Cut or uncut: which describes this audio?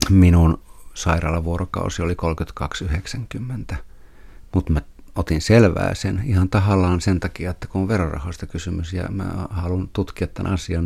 uncut